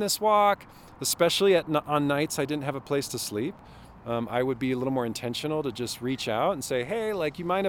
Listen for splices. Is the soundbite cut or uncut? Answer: uncut